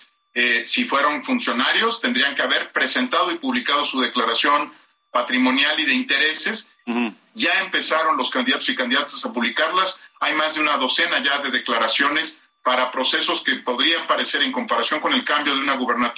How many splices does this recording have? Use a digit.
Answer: 1